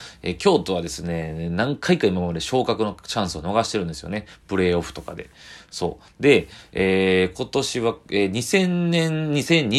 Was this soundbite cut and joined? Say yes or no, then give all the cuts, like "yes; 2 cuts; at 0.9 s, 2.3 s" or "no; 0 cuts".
no; 0 cuts